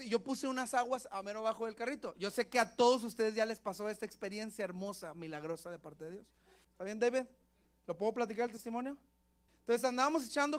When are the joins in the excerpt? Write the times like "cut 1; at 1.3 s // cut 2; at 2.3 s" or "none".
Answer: cut 1; at 6.6 s // cut 2; at 9.5 s